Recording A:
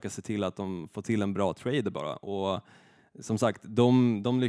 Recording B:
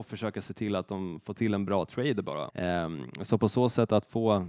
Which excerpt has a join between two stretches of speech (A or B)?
B